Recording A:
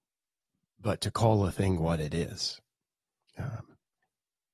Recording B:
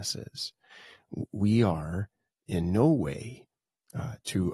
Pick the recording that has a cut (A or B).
A